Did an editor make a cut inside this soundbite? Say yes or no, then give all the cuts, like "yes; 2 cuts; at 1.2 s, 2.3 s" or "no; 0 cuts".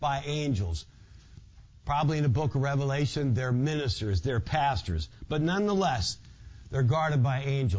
no; 0 cuts